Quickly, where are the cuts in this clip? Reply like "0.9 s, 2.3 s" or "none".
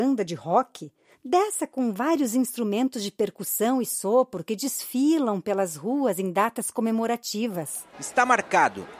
1.1 s, 7.9 s